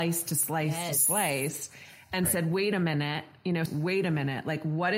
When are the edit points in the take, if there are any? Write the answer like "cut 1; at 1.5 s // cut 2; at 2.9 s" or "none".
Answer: cut 1; at 3.7 s